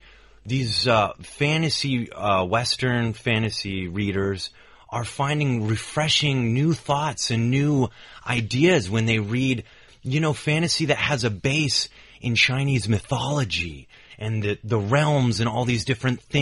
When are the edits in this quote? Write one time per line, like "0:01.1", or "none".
none